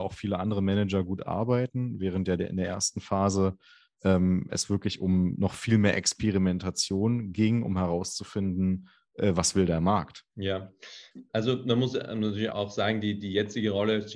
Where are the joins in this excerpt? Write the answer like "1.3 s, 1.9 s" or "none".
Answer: 10.3 s, 12.5 s